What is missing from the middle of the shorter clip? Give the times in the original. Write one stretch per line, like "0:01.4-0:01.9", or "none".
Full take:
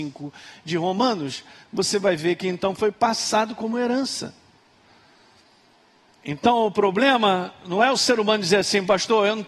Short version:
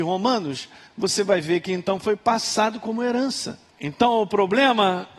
0:04.4-0:06.1